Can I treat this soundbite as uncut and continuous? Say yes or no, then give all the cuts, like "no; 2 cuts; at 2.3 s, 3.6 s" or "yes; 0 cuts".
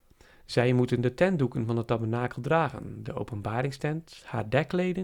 yes; 0 cuts